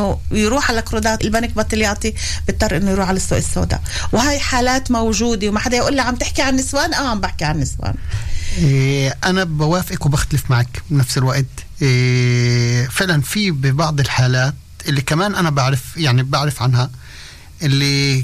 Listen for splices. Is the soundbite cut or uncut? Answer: cut